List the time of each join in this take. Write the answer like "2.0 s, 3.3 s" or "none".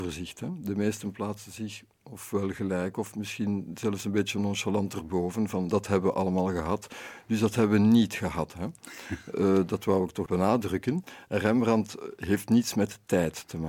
10.3 s